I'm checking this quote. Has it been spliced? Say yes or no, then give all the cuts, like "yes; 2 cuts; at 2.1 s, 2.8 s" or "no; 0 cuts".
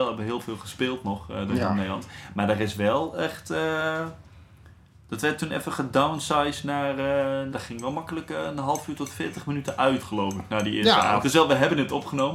yes; 2 cuts; at 7.5 s, 11.2 s